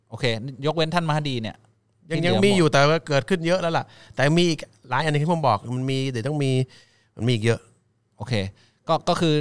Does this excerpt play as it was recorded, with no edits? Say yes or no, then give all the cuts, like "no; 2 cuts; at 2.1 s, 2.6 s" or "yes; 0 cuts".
yes; 0 cuts